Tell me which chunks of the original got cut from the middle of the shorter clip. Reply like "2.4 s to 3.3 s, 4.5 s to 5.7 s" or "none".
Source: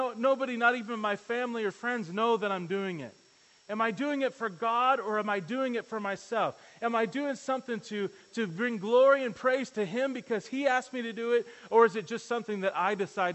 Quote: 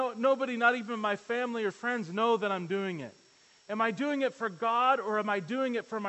none